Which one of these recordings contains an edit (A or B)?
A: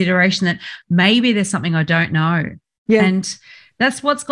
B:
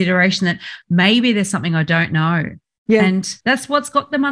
B